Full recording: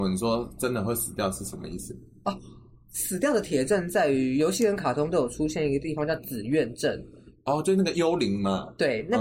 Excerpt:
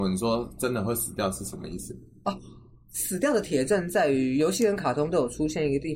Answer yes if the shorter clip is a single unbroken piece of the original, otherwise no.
yes